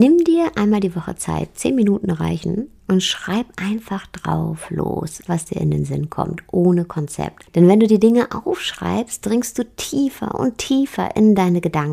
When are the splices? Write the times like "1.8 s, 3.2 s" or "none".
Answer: 5.3 s, 7.5 s